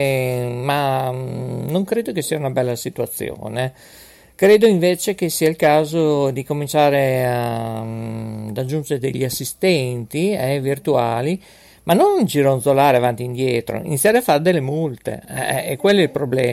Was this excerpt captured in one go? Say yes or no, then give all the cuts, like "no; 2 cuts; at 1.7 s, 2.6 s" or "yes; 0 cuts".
yes; 0 cuts